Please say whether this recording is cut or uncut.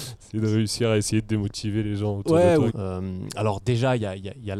cut